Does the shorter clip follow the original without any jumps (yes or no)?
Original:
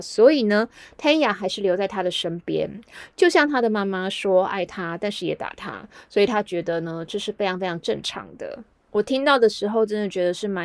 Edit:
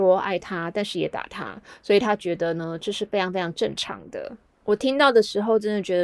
yes